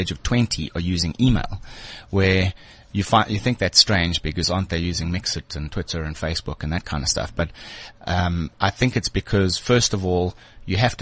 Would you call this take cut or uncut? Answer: uncut